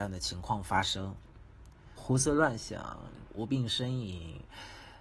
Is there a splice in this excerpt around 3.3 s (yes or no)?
yes